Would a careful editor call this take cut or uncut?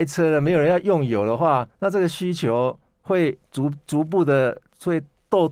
uncut